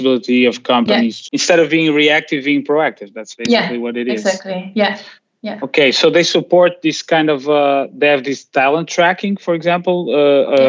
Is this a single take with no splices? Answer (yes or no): no